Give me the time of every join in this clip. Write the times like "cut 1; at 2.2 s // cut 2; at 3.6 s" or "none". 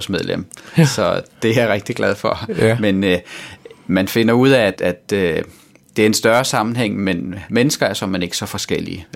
cut 1; at 4.8 s